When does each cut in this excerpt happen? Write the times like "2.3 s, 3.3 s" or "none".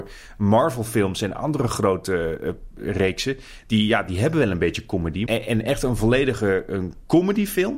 5.3 s